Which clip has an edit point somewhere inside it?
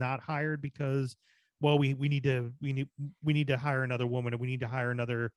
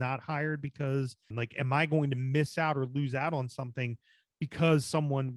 second; 1 cut; at 1.3 s

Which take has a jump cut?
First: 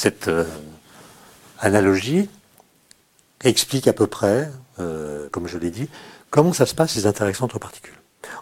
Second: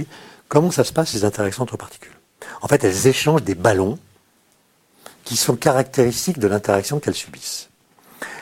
first; 1 cut; at 5.3 s

